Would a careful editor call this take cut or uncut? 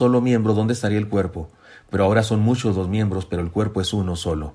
uncut